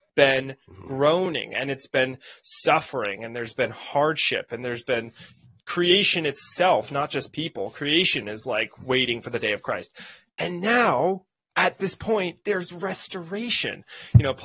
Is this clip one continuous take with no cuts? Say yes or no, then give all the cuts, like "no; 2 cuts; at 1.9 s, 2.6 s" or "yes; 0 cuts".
yes; 0 cuts